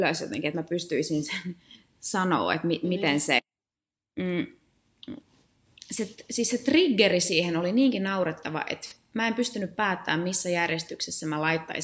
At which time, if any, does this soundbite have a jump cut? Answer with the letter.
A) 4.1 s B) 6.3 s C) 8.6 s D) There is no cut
D